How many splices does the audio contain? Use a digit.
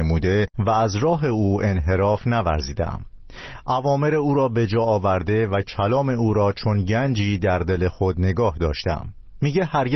0